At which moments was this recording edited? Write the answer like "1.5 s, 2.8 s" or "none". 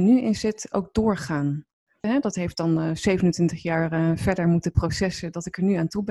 2.0 s